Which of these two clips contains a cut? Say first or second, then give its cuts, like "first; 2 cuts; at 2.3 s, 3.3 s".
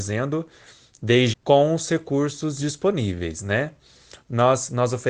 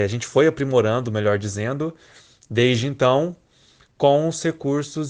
first; 1 cut; at 1.3 s